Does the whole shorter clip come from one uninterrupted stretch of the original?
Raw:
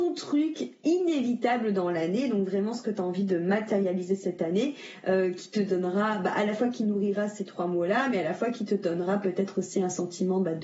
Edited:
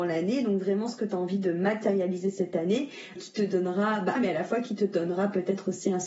no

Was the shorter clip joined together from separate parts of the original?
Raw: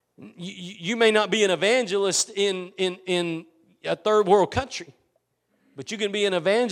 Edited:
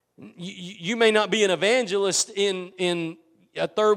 yes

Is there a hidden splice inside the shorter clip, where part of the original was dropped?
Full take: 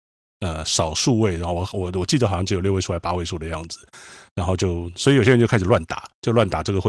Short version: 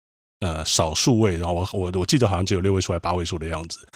no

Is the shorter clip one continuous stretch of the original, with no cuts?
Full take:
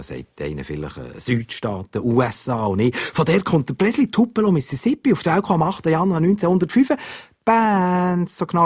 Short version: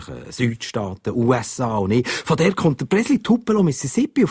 yes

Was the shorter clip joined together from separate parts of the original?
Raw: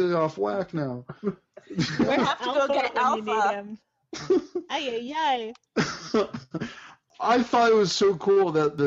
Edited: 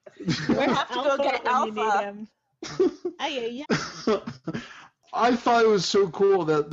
yes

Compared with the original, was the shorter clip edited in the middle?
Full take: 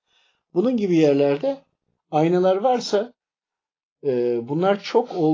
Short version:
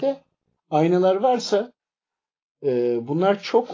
no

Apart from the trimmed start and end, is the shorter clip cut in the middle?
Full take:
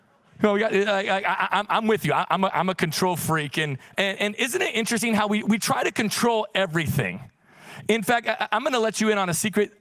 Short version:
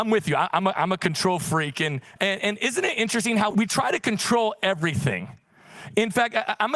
yes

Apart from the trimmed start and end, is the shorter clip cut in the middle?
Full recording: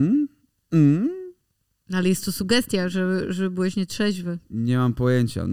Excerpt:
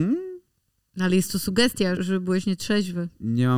yes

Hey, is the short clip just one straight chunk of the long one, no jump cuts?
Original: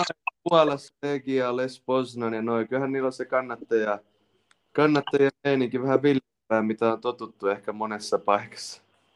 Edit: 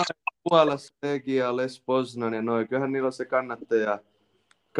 yes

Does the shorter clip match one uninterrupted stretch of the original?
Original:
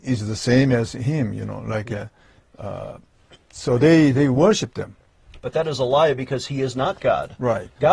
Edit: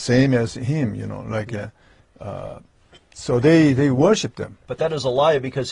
no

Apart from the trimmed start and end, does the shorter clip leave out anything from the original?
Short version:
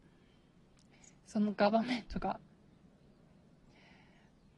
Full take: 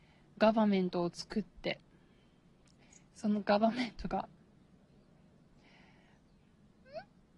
no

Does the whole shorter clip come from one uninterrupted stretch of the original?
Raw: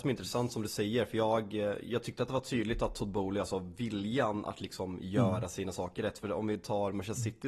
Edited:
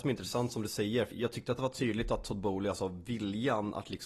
no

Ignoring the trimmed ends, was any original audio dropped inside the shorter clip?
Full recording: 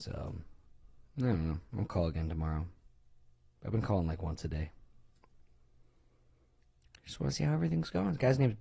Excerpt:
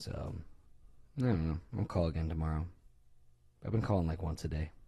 no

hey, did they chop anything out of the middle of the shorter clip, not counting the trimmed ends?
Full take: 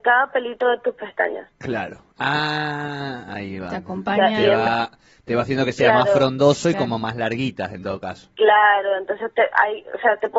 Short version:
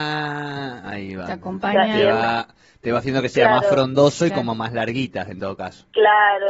no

